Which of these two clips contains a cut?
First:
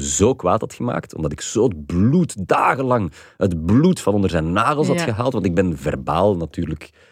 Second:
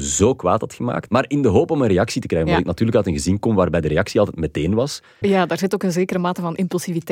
second; 2 cuts; at 1.1 s, 5.2 s

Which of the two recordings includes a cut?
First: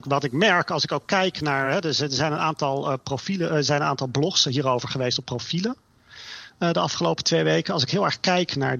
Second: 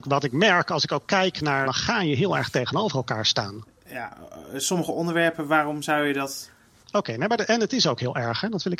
second; 2 cuts; at 1.6 s, 6.8 s

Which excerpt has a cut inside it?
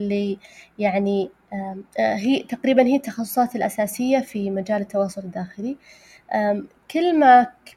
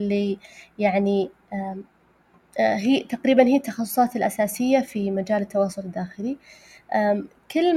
first; 1 cut; at 1.9 s

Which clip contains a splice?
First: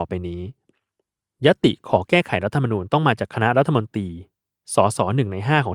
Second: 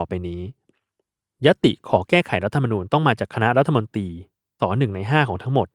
second; 1 cut; at 4.6 s

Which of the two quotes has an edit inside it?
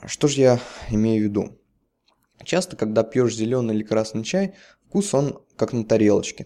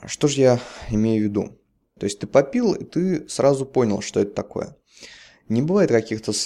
second; 1 cut; at 2.0 s

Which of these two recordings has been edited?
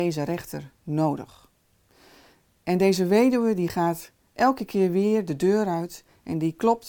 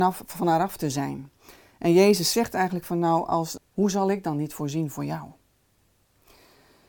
second; 1 cut; at 3.6 s

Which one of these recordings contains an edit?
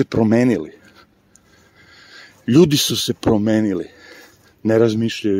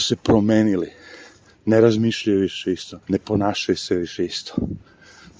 second; 1 cut; at 3.0 s

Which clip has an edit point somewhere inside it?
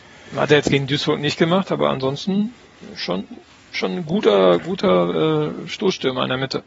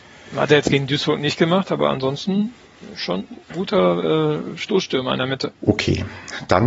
second; 2 cuts; at 3.5 s, 5.6 s

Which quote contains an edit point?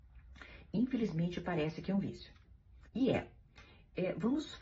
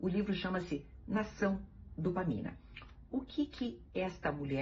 first; 1 cut; at 2.9 s

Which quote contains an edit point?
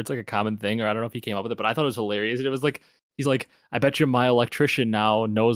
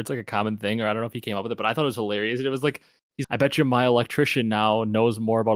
second; 1 cut; at 3.2 s

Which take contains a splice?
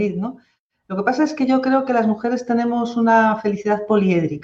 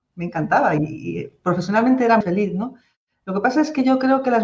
second; 1 cut; at 2.2 s

